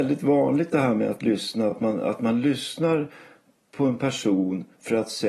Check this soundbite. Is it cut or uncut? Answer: uncut